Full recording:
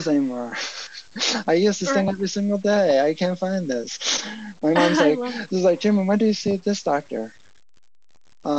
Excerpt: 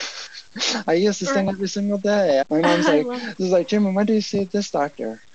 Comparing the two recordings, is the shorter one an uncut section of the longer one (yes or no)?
no